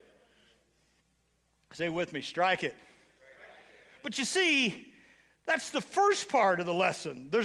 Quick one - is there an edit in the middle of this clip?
no; 0 cuts

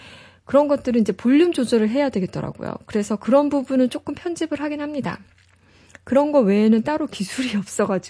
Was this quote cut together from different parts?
no; 0 cuts

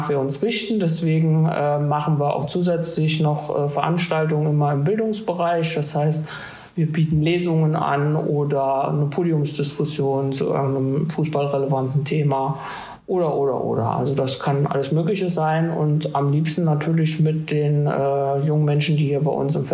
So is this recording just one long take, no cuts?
yes; 0 cuts

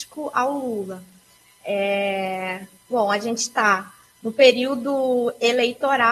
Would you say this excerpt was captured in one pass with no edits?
no; 1 cut; at 1.5 s

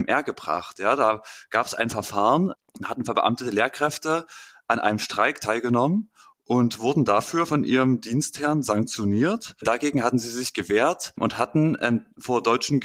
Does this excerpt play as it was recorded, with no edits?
yes; 0 cuts

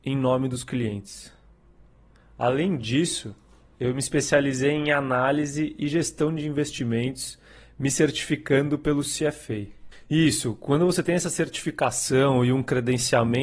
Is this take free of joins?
no; 1 cut; at 9.9 s

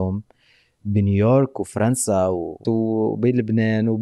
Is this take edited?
yes; 1 cut; at 2.6 s

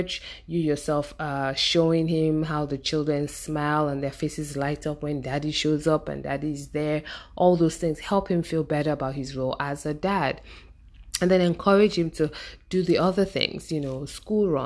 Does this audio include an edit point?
no; 0 cuts

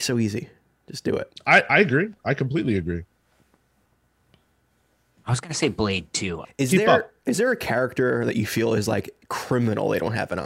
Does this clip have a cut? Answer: yes; 2 cuts; at 1.7 s, 6.4 s

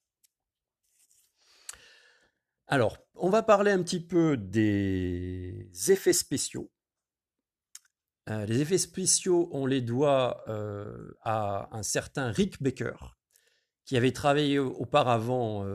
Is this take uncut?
yes; 0 cuts

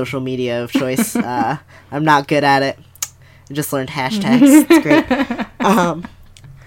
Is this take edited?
no; 0 cuts

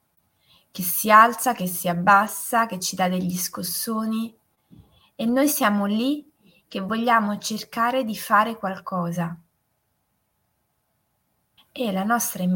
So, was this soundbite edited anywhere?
yes; 1 cut; at 11.6 s

